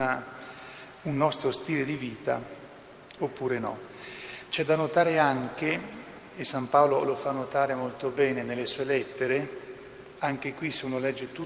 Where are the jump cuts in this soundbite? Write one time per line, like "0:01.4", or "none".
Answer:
0:03.2